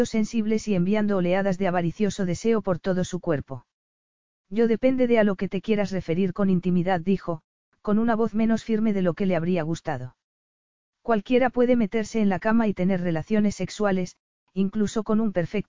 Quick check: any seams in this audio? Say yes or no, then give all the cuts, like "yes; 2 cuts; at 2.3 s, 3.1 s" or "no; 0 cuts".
no; 0 cuts